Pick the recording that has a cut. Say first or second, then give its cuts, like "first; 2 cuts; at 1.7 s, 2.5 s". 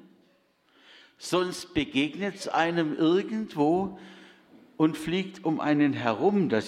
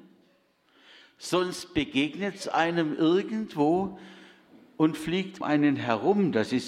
second; 1 cut; at 5.4 s